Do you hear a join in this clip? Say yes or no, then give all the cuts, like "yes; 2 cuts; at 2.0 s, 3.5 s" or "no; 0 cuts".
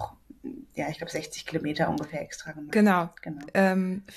no; 0 cuts